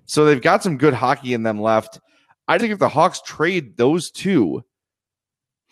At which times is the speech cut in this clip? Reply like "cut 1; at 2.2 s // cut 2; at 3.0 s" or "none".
cut 1; at 2.6 s